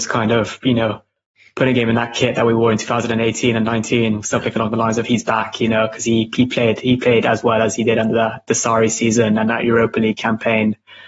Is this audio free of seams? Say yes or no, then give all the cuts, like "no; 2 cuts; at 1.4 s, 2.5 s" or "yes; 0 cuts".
yes; 0 cuts